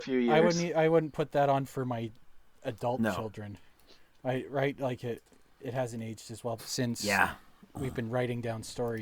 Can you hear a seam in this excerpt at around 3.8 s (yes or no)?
no